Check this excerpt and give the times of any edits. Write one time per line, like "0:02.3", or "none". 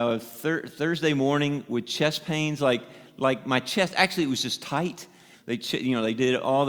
0:05.3